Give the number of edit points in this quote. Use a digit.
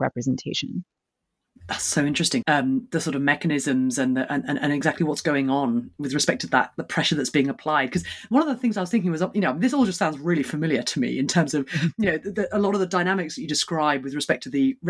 1